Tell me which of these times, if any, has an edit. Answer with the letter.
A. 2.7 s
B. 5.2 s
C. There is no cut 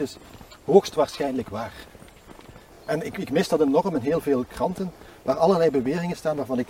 C